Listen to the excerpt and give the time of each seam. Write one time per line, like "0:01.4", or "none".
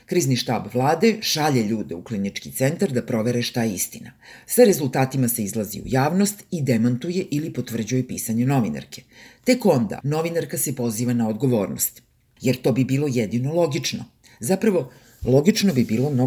0:10.0
0:12.4